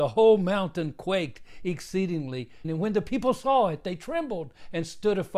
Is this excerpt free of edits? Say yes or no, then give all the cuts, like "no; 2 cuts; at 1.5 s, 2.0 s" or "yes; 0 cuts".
no; 1 cut; at 2.6 s